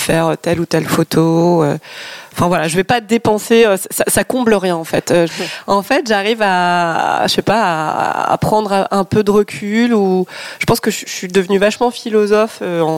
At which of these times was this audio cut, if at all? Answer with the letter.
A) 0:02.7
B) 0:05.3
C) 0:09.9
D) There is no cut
B